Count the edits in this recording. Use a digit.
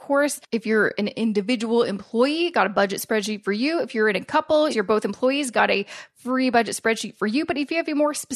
1